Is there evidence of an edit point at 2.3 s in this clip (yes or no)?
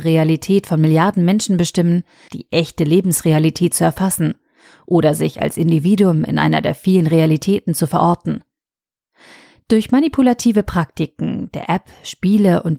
yes